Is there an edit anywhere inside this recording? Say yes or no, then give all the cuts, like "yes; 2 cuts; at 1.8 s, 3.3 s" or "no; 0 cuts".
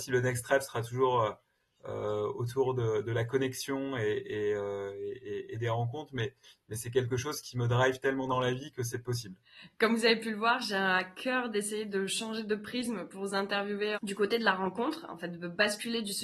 no; 0 cuts